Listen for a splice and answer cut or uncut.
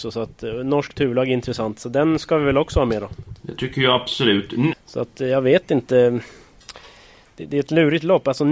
cut